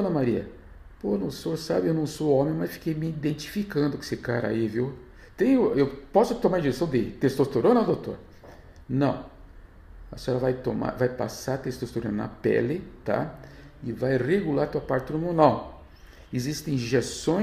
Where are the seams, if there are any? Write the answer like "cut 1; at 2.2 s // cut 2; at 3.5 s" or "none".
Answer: none

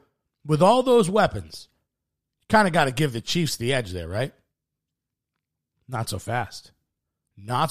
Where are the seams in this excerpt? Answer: none

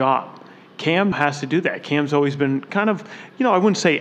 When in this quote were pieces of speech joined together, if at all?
cut 1; at 1.1 s

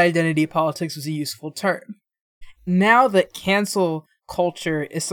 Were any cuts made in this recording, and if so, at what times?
cut 1; at 2.6 s

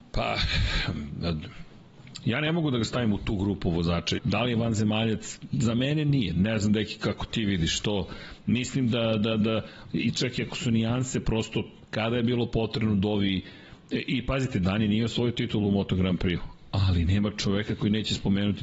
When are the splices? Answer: cut 1; at 4.2 s

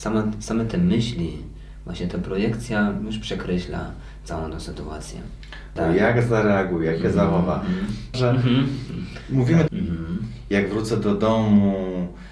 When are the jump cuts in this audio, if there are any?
cut 1; at 5.8 s // cut 2; at 8.1 s // cut 3; at 9.7 s

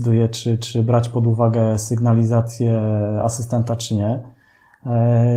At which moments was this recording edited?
none

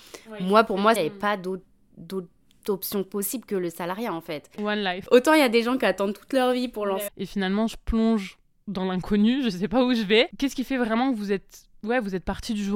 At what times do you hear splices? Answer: cut 1; at 1.0 s // cut 2; at 4.6 s // cut 3; at 7.1 s

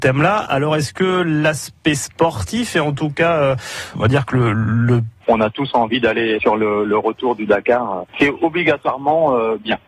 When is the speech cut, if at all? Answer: cut 1; at 3.9 s // cut 2; at 5.2 s

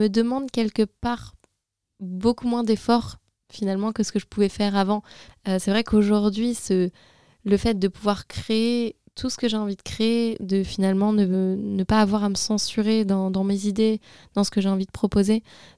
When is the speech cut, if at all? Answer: cut 1; at 5.3 s

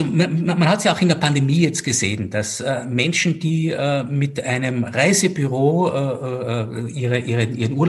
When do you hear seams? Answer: none

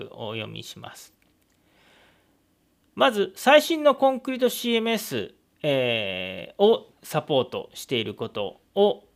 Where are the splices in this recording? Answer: none

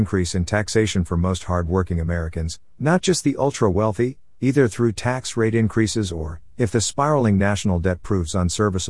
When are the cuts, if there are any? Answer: none

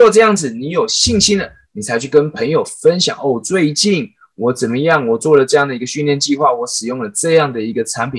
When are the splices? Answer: none

